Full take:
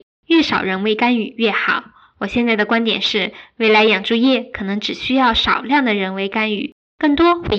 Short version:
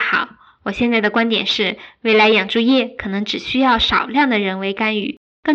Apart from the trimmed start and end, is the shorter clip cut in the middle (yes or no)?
no